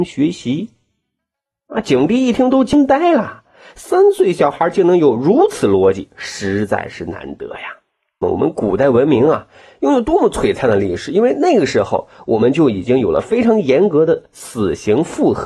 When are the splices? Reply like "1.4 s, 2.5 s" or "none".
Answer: 8.2 s